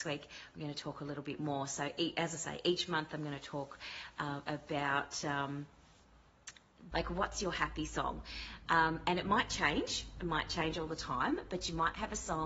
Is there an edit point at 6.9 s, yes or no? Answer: yes